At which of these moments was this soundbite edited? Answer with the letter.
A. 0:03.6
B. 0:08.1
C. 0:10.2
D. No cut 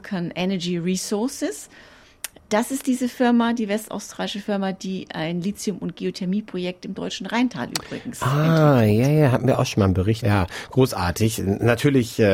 C